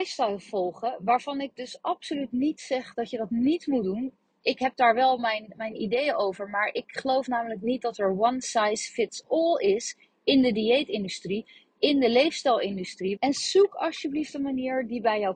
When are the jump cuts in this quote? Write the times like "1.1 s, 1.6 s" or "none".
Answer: 13.2 s

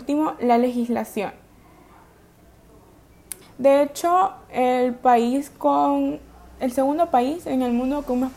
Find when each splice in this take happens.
3.4 s

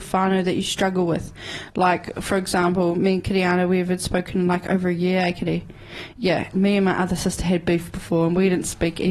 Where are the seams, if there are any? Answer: 6.5 s

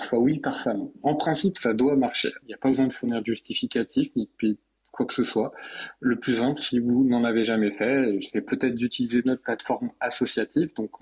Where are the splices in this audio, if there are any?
2.4 s

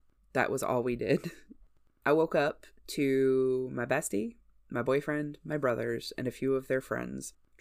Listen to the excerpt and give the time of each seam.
none

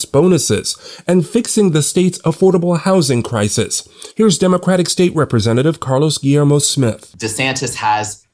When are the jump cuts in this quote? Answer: none

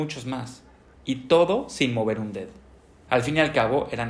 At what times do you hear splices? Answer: 0.9 s, 3.1 s

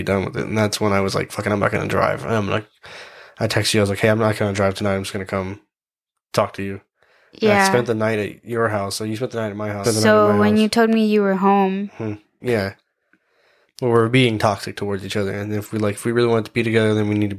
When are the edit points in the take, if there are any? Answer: 9.8 s, 12.4 s

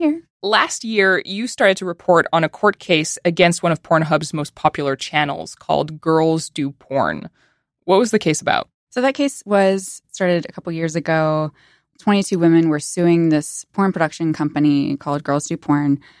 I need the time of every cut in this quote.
none

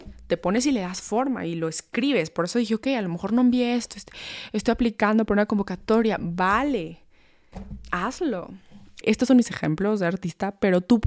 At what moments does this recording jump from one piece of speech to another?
9.0 s

